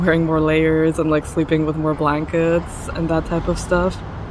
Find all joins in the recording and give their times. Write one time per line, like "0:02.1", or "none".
none